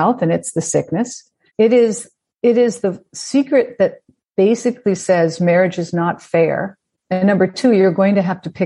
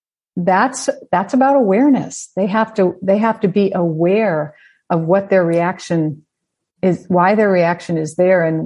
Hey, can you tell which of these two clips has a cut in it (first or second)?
first